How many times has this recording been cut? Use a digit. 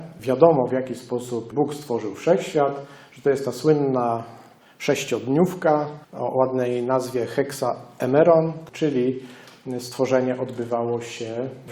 1